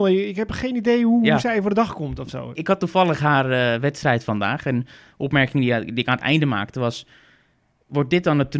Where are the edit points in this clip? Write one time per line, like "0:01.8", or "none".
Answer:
0:02.6